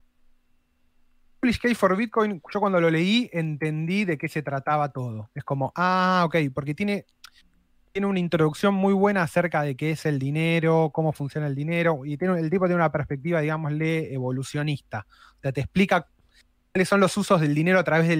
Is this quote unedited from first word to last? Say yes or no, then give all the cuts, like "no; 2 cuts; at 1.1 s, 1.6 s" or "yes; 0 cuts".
yes; 0 cuts